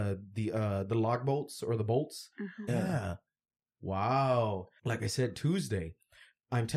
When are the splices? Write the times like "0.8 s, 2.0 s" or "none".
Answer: 2.7 s, 4.8 s